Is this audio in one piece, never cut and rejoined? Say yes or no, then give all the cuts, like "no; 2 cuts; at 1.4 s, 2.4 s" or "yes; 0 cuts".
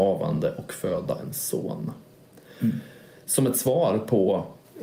yes; 0 cuts